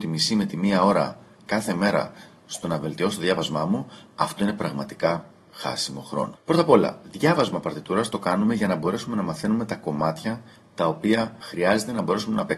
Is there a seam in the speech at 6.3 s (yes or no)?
yes